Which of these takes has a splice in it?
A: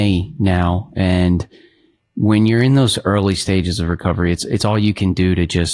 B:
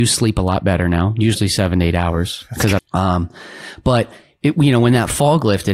B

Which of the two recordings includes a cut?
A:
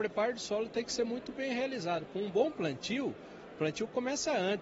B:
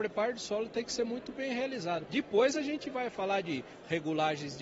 B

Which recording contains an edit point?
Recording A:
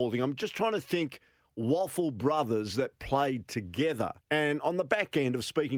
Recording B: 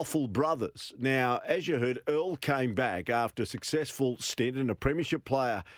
A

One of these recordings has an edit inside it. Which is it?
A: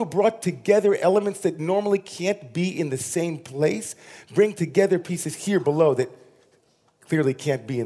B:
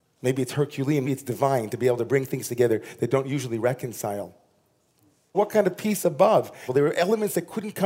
B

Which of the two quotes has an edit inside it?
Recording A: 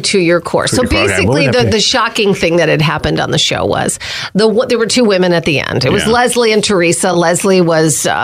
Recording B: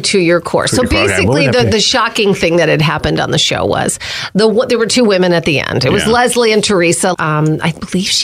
B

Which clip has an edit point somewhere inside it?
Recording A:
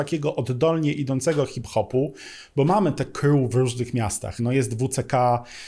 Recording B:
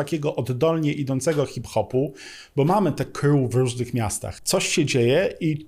B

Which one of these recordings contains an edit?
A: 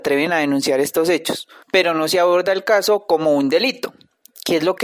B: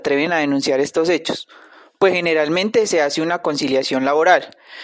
A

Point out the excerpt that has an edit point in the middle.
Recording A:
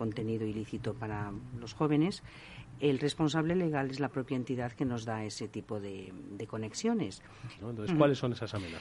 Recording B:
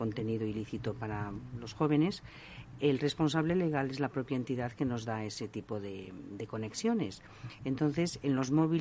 A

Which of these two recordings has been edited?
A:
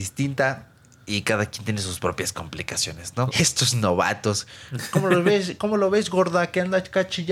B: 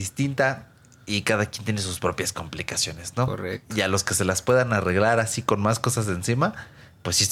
A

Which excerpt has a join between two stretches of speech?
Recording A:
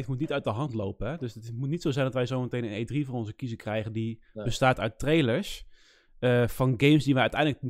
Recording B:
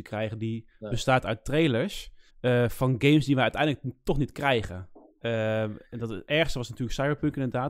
B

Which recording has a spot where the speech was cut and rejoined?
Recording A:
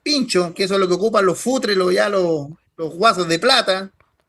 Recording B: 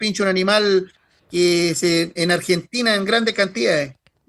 B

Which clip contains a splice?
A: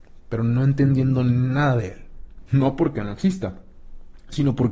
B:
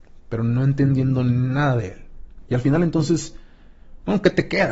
A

